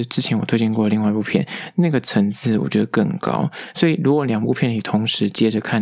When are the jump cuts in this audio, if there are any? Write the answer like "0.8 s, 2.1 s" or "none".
none